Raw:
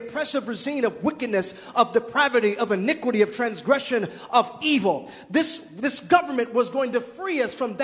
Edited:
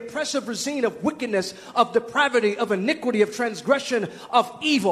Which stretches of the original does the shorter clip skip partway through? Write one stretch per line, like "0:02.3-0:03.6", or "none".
none